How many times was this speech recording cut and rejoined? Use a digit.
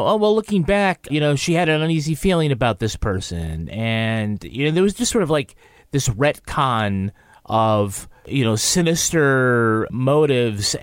1